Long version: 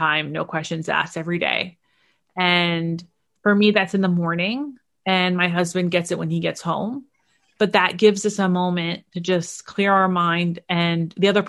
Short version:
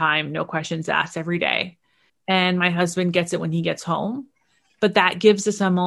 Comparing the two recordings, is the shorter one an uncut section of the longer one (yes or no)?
no